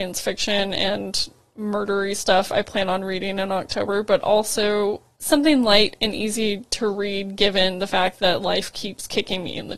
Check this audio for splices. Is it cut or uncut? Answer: cut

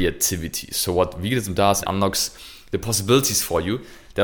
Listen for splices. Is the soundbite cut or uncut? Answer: cut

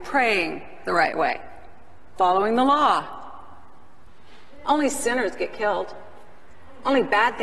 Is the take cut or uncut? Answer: cut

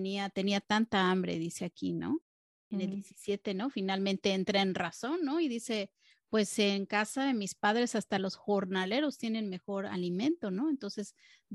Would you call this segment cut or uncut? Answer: uncut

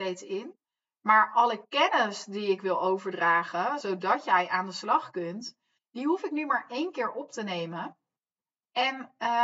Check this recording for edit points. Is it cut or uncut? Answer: uncut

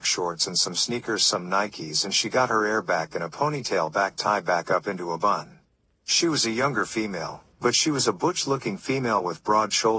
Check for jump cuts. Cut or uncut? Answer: cut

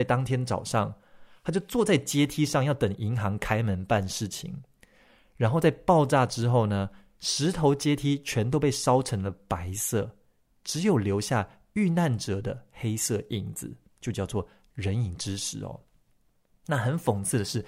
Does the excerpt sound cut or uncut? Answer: uncut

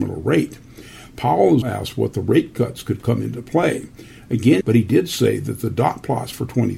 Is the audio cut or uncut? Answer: cut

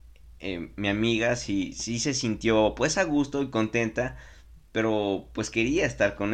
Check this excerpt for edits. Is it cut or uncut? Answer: uncut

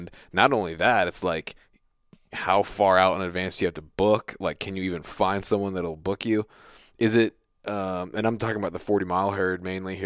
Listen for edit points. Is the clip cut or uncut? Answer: uncut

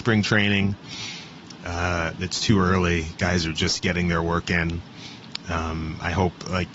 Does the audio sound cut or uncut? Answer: cut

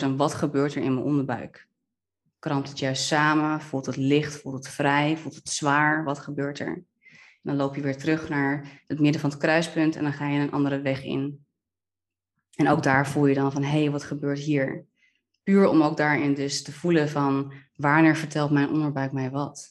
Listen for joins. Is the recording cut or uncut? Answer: uncut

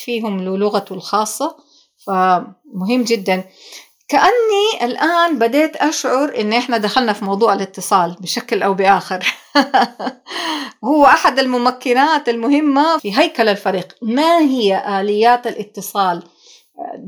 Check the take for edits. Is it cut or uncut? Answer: cut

